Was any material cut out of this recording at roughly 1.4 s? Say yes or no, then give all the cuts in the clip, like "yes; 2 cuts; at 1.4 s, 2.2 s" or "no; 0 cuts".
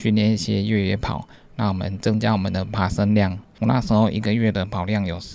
no; 1 cut; at 3.5 s